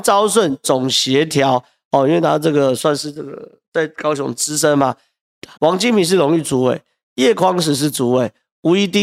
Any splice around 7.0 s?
no; 1 cut; at 5.5 s

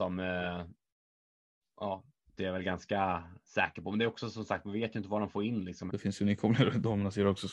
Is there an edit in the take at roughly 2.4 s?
yes; 2 cuts; at 2.4 s, 5.9 s

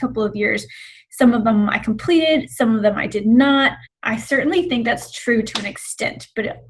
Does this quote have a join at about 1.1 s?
no; 1 cut; at 3.9 s

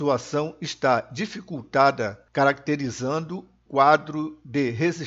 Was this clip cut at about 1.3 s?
no; 1 cut; at 3.7 s

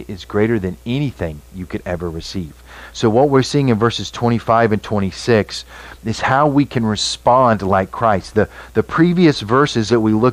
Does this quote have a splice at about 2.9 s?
no; 0 cuts

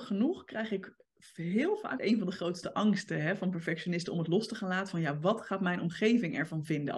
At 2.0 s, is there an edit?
yes; 1 cut; at 2.0 s

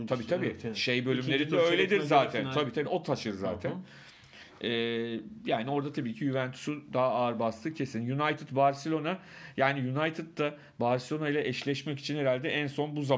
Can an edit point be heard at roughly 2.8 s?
yes; 1 cut; at 2.8 s

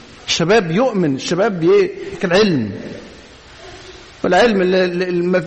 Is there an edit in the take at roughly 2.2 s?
yes; 1 cut; at 2.2 s

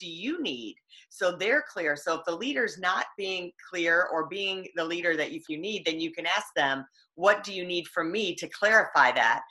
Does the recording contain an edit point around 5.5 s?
yes; 1 cut; at 5.5 s

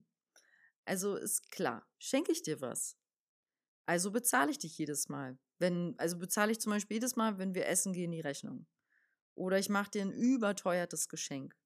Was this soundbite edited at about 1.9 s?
yes; 2 cuts; at 1.9 s, 3.8 s

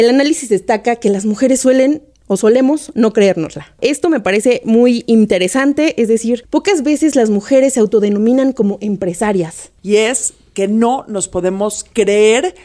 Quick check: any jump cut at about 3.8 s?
no; 1 cut; at 9.8 s

